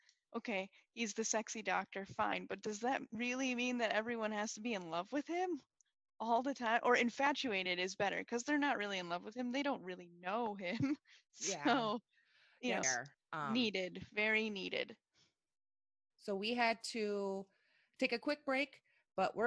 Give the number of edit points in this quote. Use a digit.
1